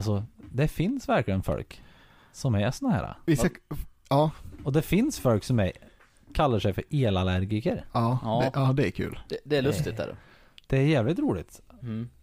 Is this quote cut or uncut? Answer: uncut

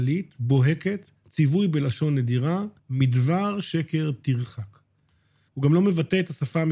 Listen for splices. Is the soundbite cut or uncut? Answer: cut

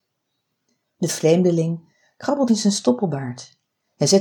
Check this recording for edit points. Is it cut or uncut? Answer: cut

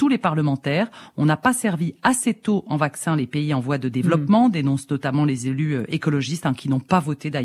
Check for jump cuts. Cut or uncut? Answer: uncut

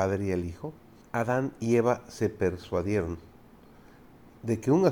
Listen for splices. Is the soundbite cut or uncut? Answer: cut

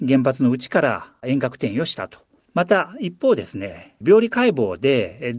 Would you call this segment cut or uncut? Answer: cut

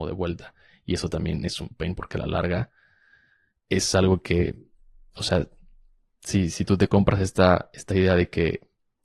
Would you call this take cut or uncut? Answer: uncut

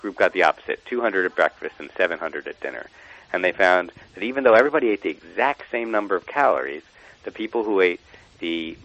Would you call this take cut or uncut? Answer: uncut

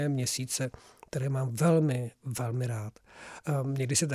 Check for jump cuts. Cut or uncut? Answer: uncut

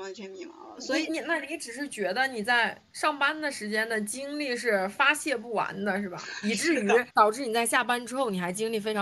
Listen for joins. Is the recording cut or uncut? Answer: cut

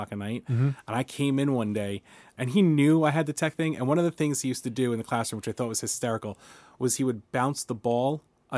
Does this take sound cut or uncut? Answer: cut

